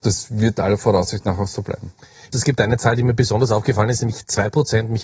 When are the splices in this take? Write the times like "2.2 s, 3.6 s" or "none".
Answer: 2.3 s